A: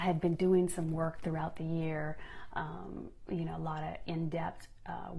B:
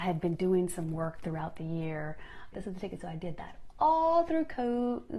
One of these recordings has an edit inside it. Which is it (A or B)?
B